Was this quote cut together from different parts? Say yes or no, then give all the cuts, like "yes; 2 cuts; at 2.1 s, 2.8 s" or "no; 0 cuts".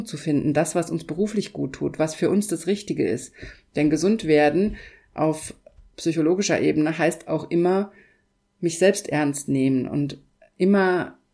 no; 0 cuts